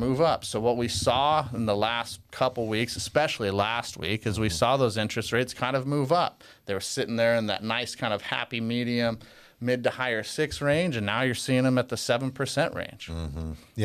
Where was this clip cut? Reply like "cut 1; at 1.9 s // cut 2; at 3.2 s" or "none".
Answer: none